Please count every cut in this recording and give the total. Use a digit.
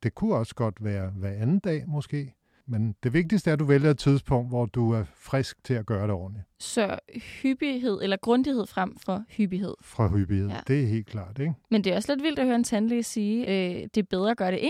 2